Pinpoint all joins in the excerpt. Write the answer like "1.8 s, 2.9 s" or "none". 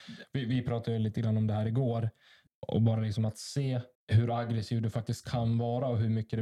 2.5 s, 4.0 s